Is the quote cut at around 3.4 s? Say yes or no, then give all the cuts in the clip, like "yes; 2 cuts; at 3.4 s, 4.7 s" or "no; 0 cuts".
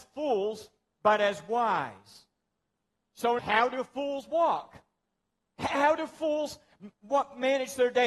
yes; 1 cut; at 3.4 s